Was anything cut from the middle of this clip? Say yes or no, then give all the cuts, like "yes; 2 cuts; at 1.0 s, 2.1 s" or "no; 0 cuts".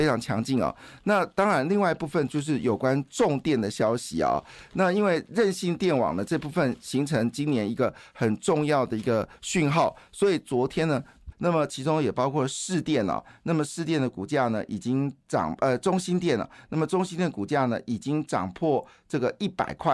yes; 1 cut; at 11.3 s